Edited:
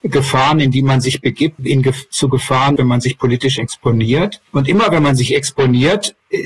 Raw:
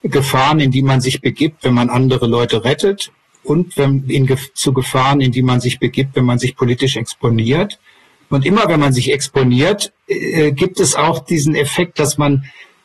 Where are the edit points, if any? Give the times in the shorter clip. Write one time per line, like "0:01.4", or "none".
0:01.6
0:02.8
0:04.5